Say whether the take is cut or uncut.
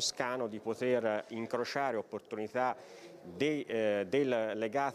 uncut